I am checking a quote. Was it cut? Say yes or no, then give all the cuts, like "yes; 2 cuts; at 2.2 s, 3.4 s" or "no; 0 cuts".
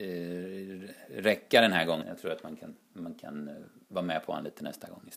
yes; 1 cut; at 2.0 s